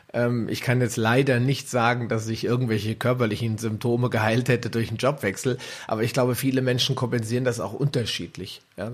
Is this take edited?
no; 0 cuts

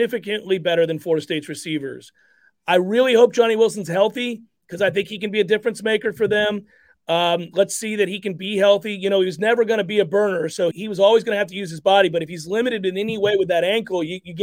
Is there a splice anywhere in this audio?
yes; 1 cut; at 10.7 s

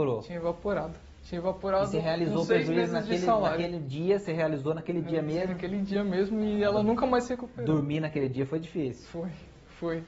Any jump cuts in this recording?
no; 0 cuts

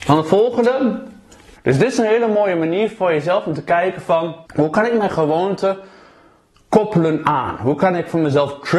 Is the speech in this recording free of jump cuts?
no; 2 cuts; at 1.6 s, 4.5 s

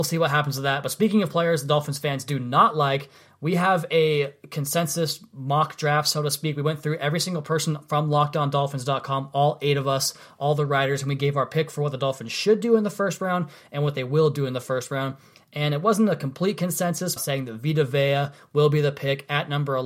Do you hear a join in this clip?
yes; 1 cut; at 17.2 s

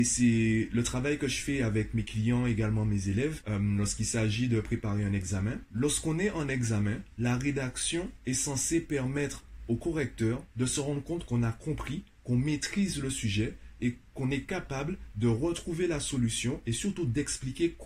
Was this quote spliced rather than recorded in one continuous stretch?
no; 0 cuts

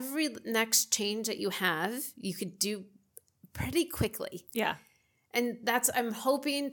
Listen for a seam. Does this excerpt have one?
no; 0 cuts

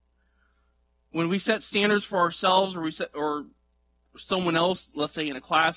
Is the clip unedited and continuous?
no; 1 cut; at 1.0 s

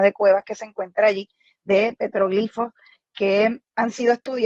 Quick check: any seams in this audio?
no; 0 cuts

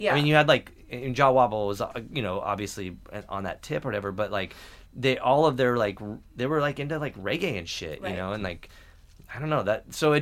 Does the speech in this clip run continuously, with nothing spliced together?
yes; 0 cuts

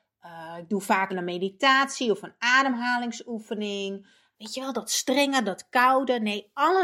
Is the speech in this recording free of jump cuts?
no; 3 cuts; at 1.1 s, 4.3 s, 5.4 s

